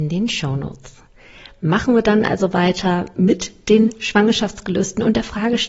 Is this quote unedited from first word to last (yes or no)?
yes